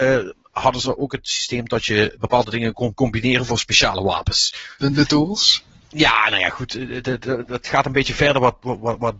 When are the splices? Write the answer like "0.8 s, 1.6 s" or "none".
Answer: 4.8 s